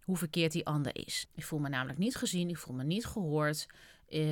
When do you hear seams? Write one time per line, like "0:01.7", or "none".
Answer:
0:01.2